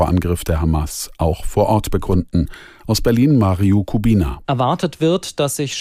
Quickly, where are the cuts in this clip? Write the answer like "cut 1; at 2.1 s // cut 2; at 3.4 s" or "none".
cut 1; at 4.4 s